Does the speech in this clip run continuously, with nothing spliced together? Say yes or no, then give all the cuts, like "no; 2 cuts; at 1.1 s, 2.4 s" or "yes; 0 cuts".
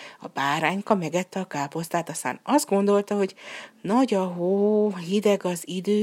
yes; 0 cuts